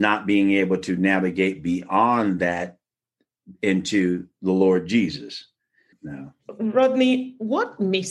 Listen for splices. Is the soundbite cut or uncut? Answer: cut